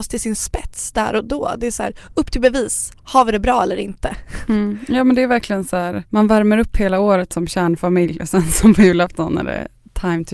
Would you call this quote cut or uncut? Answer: uncut